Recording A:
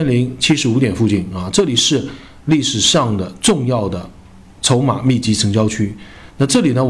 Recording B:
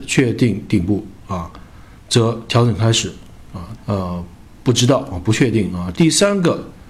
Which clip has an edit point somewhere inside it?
B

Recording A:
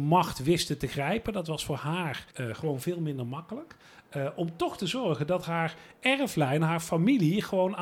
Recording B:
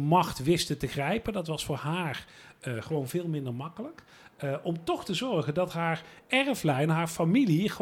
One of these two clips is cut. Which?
A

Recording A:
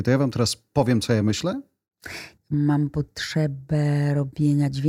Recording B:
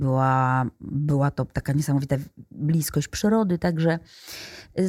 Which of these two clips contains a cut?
A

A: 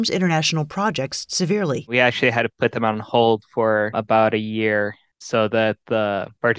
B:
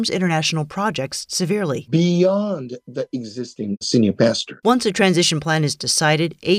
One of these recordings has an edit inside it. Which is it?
B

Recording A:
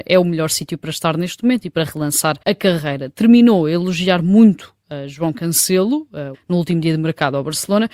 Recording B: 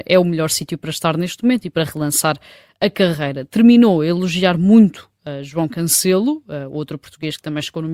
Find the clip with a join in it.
A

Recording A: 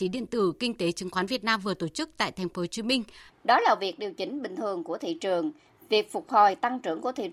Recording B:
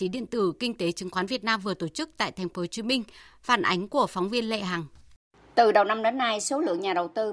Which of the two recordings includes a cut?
A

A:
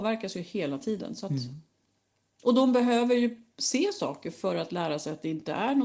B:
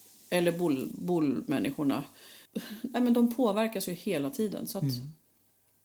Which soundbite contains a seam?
B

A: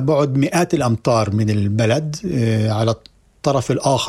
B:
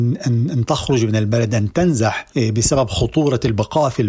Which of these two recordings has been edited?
B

